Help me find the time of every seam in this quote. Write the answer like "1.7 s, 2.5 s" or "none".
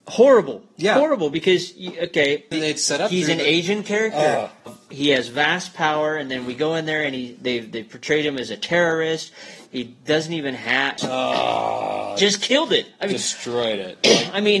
2.5 s, 4.7 s, 11.0 s